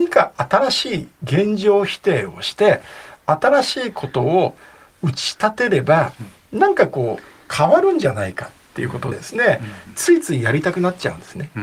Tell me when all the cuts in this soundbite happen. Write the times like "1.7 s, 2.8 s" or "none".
9.1 s

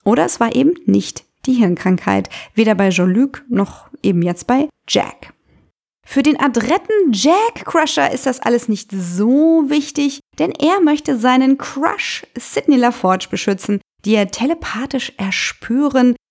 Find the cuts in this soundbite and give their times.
none

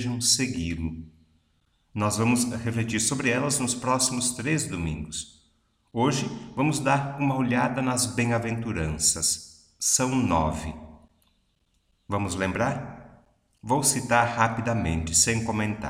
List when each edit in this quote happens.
none

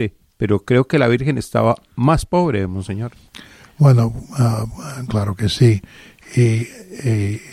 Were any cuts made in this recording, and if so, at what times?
none

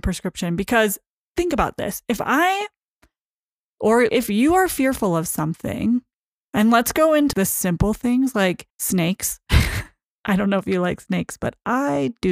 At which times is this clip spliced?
4.1 s, 7.3 s, 8.7 s

